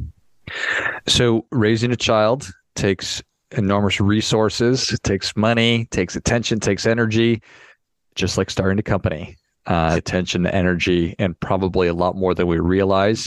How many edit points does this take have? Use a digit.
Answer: 1